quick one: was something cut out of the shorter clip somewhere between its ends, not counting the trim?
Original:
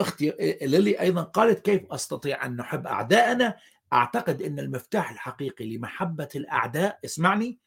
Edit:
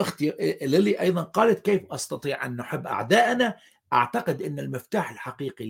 no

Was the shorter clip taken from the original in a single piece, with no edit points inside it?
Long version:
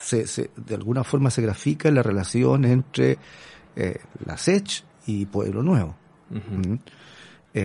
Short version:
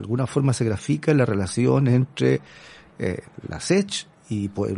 yes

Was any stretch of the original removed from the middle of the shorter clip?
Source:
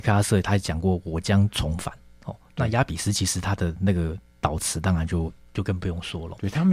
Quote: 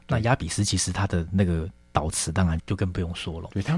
yes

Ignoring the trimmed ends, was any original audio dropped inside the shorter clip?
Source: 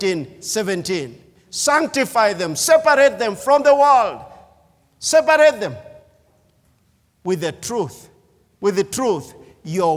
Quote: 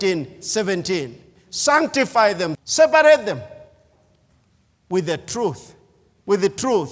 yes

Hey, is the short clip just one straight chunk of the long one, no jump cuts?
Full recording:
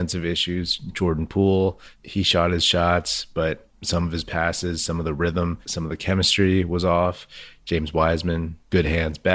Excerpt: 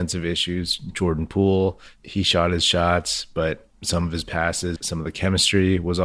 no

